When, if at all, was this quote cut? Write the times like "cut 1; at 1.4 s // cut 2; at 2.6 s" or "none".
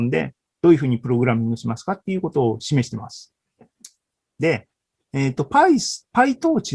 none